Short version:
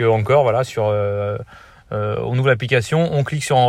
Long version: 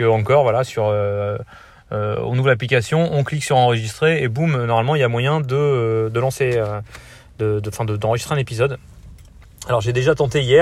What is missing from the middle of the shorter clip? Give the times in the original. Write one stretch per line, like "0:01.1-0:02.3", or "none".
none